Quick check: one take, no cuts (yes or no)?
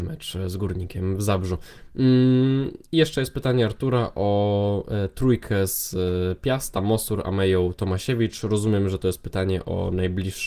yes